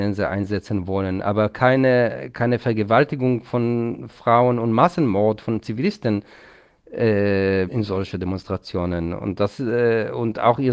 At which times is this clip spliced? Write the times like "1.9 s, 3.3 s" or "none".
7.7 s